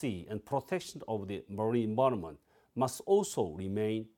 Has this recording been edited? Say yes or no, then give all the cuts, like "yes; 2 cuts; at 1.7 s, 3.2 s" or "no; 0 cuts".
no; 0 cuts